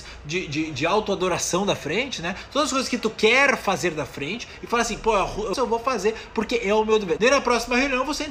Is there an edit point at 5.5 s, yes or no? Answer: yes